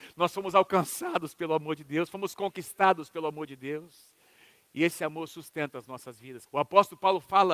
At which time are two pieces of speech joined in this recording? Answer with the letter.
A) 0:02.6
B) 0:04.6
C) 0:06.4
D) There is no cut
C